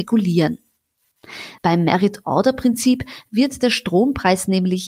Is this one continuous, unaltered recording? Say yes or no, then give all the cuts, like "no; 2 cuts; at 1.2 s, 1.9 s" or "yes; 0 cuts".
no; 1 cut; at 1.6 s